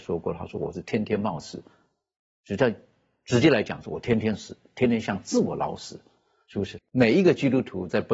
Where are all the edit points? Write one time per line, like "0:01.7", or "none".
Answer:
0:06.8